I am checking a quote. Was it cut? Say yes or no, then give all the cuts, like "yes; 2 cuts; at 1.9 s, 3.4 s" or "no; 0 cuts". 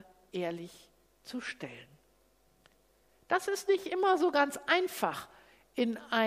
no; 0 cuts